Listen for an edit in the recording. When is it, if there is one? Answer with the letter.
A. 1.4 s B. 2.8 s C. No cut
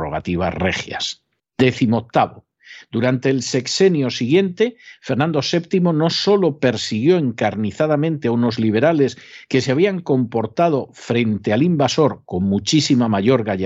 A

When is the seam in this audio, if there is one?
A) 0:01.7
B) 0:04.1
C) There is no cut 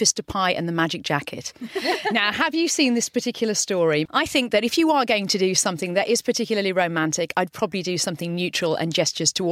B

